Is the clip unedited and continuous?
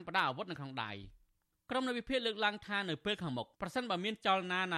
no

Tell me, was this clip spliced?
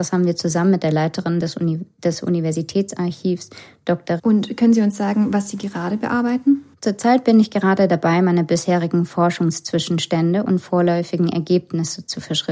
yes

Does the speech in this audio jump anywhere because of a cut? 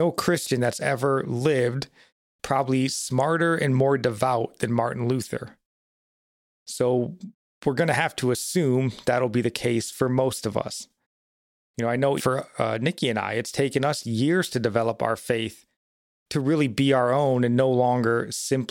yes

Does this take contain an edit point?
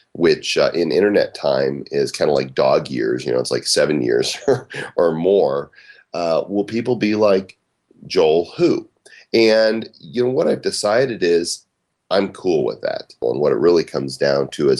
yes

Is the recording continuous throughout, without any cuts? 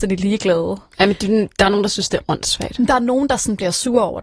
yes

